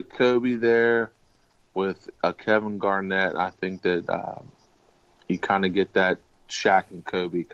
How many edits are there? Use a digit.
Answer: 0